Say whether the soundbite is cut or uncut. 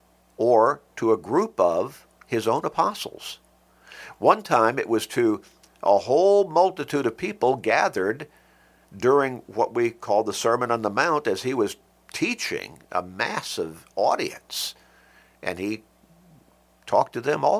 uncut